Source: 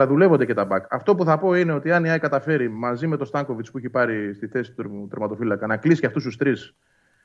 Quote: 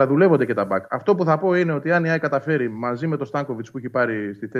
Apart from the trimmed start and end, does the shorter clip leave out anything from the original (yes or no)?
no